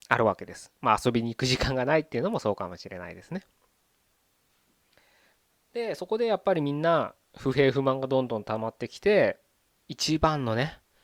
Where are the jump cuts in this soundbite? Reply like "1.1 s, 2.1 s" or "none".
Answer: none